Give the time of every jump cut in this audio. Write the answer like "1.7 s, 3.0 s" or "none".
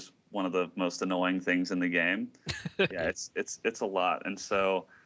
2.9 s